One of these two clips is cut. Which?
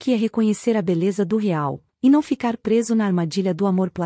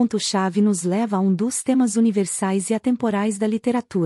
first; 1 cut; at 1.9 s

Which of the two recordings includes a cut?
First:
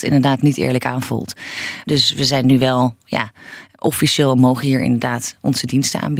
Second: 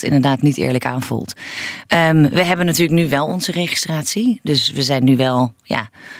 first; 1 cut; at 1.8 s

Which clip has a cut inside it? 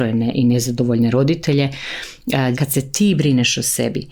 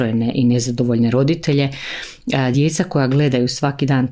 first; 1 cut; at 2.5 s

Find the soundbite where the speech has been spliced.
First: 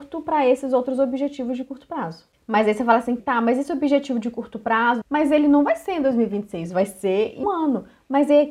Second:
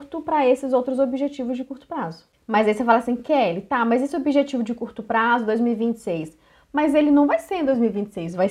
first; 3 cuts; at 3.2 s, 5.0 s, 7.4 s

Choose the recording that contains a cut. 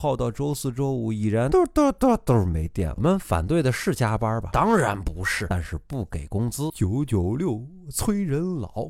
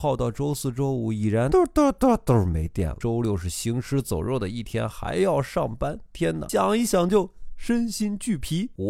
first; 2 cuts; at 3.0 s, 5.5 s

